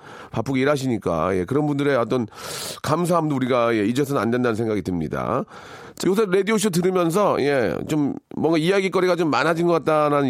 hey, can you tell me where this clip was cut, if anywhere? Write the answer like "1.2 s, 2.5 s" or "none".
6.0 s